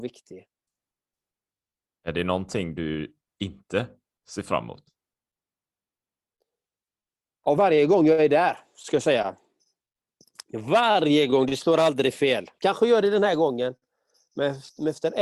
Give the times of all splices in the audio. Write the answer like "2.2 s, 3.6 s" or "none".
1.9 s, 7.6 s